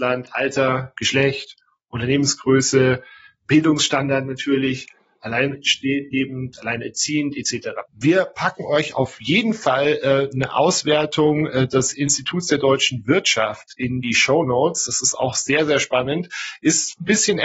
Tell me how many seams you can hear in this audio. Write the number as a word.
one